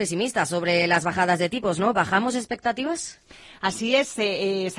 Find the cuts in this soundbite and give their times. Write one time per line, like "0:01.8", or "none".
none

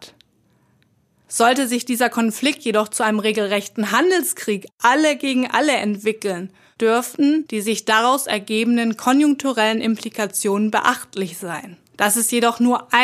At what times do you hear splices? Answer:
0:11.9

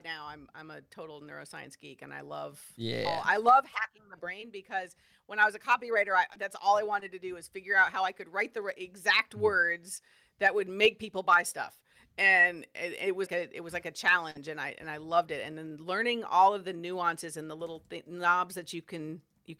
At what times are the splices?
0:13.3

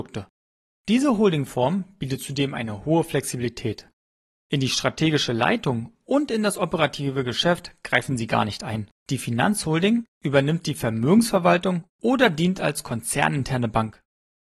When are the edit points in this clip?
0:04.4
0:09.0

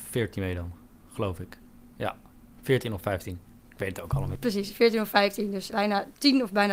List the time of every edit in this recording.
0:05.7

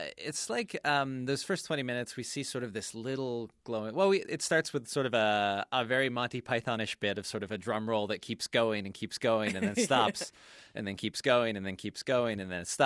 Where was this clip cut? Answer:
none

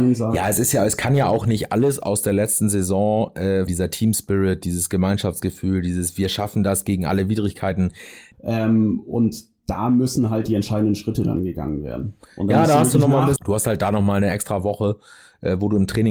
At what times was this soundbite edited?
0:03.7
0:08.3
0:13.4

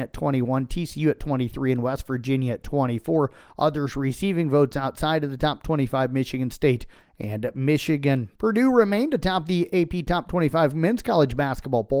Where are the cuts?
0:08.4

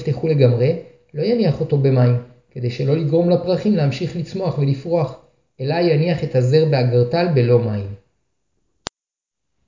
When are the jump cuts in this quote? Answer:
none

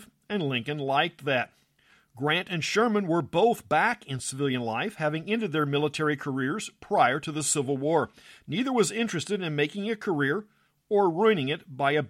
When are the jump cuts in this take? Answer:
none

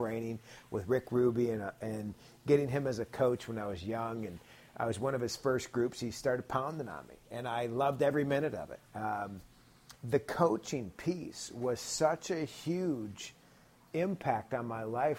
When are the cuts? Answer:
0:08.9
0:10.0

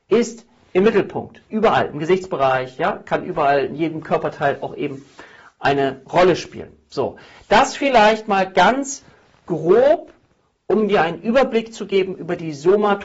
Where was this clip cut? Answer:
0:01.5

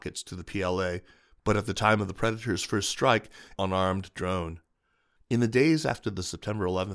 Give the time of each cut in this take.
0:03.6
0:05.2

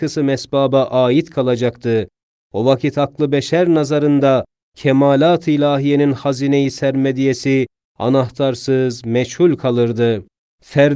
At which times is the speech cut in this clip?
none

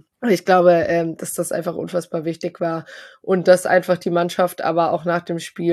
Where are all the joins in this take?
none

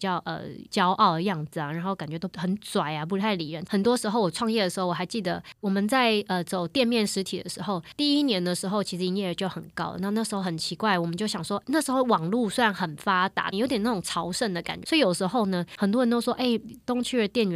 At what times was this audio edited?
0:03.7
0:13.5
0:14.8

